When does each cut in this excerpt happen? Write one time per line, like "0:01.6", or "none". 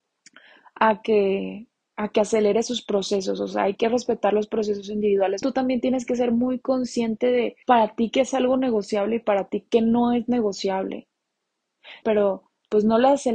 0:05.4
0:07.6
0:12.0